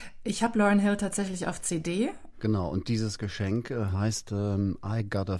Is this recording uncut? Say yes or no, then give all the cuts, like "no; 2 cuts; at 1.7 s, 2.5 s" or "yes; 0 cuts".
no; 1 cut; at 2.3 s